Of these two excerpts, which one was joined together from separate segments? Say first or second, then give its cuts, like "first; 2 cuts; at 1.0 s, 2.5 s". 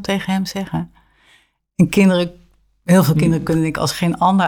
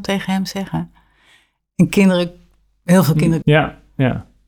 second; 1 cut; at 3.4 s